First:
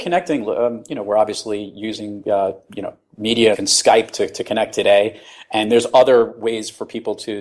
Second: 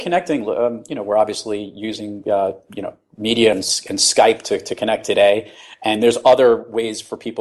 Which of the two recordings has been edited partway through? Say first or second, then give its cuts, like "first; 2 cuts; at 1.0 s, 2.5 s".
first; 1 cut; at 3.5 s